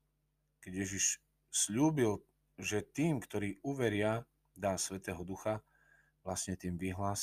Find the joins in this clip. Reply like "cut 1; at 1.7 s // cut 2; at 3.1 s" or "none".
none